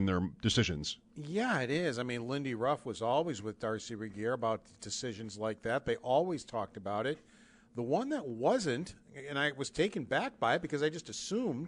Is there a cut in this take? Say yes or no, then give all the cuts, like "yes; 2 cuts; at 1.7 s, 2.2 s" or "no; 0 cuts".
no; 0 cuts